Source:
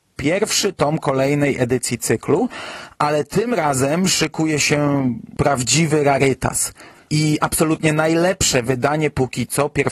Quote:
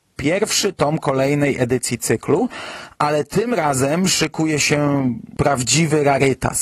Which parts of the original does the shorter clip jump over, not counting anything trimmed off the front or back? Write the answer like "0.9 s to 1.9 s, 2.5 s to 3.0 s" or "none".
none